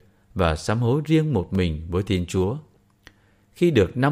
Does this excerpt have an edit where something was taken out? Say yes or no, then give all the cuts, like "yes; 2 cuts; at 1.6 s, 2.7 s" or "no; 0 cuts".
no; 0 cuts